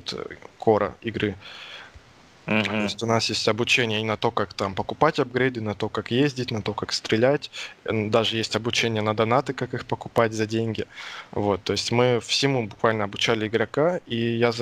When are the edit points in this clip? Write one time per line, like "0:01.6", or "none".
none